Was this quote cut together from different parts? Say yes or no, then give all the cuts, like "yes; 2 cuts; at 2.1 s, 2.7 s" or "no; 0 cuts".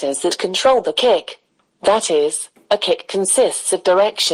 no; 0 cuts